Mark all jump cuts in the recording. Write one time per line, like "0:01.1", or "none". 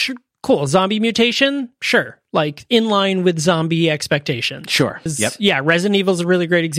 0:05.1